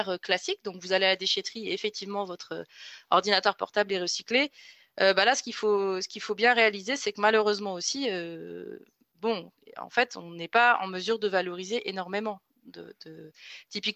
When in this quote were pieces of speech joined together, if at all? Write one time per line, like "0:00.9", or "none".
none